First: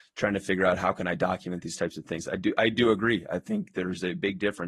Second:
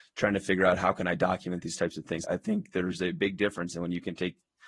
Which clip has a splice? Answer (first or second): second